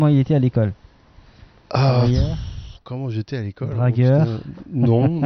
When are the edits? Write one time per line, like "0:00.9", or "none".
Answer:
none